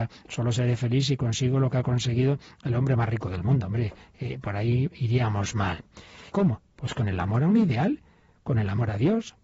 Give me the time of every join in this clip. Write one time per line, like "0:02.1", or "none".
0:06.3